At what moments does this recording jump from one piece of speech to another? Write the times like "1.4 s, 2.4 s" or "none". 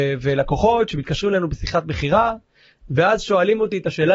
none